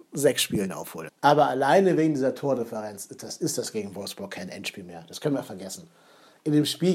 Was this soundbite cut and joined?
yes; 1 cut; at 1.1 s

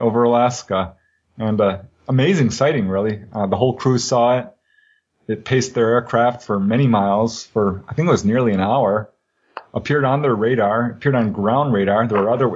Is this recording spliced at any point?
no; 0 cuts

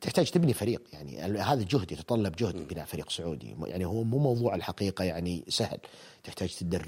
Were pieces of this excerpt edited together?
no; 0 cuts

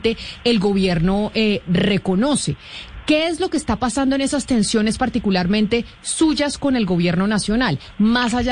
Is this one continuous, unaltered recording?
yes; 0 cuts

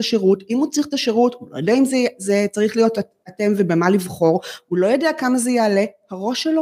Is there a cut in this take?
no; 0 cuts

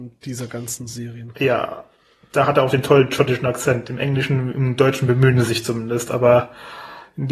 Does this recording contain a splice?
no; 0 cuts

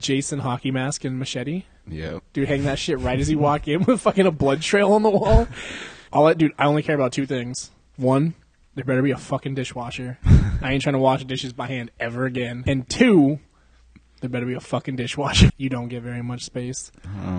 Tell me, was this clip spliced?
yes; 3 cuts; at 6.1 s, 12.7 s, 15.5 s

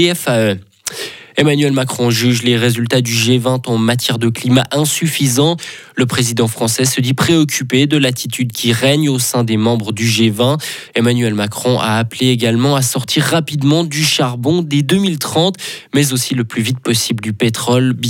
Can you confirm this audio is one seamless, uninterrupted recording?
no; 1 cut; at 10.9 s

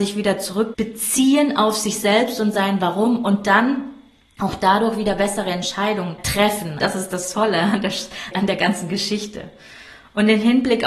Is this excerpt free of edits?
no; 2 cuts; at 6.8 s, 8.3 s

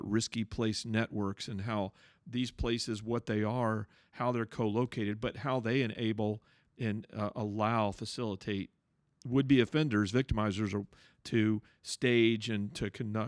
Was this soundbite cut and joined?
no; 0 cuts

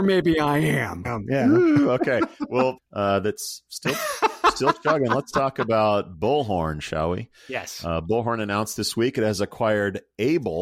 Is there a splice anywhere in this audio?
yes; 2 cuts; at 1.0 s, 2.8 s

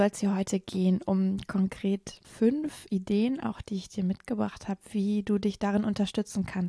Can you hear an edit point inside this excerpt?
yes; 1 cut; at 2.2 s

